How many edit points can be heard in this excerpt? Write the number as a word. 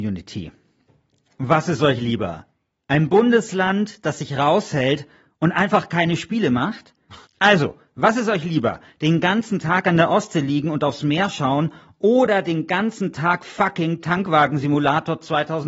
one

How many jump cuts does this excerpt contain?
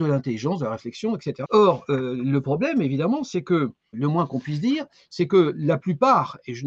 two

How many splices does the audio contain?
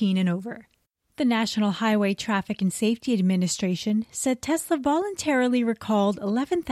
one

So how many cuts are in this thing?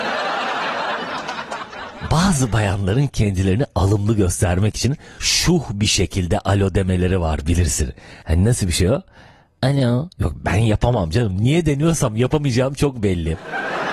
zero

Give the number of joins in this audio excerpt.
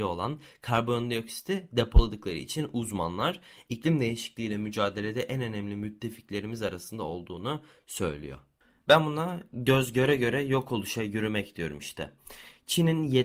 one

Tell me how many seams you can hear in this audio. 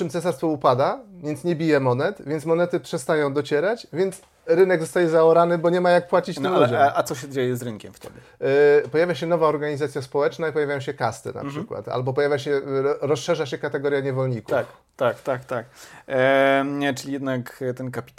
zero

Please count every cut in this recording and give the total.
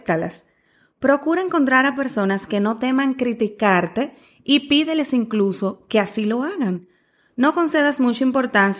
zero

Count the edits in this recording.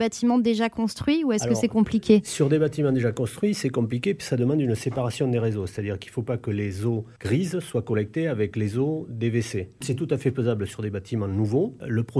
zero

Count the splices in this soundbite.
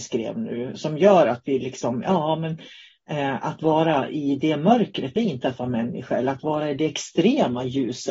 zero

